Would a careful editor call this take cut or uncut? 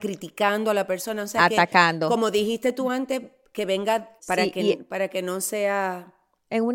cut